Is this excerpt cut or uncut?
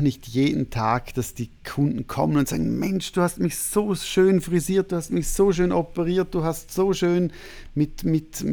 uncut